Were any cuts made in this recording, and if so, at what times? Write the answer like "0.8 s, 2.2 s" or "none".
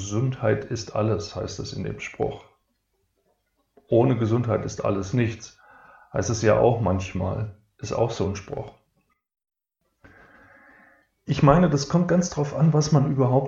none